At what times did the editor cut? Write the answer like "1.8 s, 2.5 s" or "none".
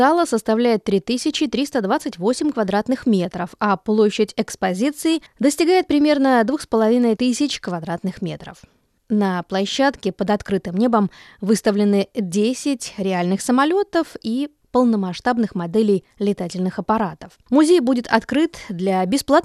7.2 s, 17.5 s